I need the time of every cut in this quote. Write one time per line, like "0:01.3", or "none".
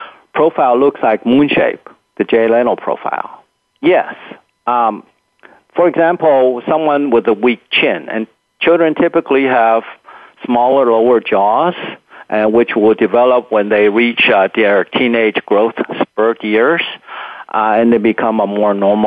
0:02.1
0:03.7